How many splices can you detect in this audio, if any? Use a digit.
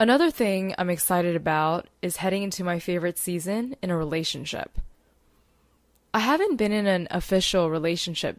0